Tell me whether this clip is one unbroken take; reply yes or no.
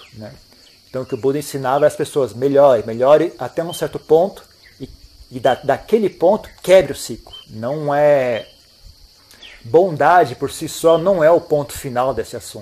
no